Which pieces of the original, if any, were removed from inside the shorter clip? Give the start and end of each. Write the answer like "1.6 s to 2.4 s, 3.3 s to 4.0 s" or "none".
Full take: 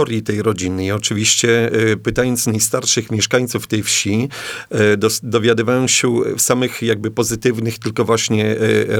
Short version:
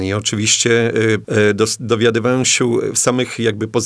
2.0 s to 4.7 s